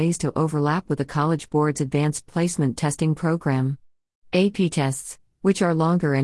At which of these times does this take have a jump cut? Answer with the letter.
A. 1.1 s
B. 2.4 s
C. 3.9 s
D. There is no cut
D